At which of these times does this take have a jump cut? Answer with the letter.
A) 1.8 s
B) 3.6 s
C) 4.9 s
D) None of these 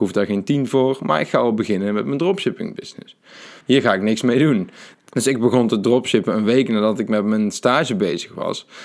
B